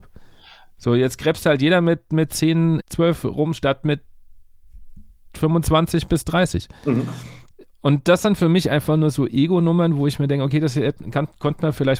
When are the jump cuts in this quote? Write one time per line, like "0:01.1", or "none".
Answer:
0:02.8